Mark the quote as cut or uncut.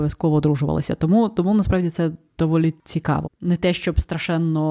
cut